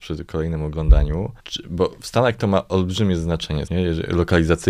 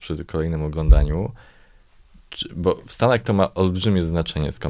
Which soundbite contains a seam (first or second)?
first